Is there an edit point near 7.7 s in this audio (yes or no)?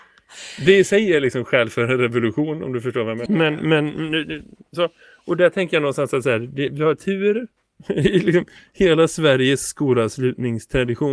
no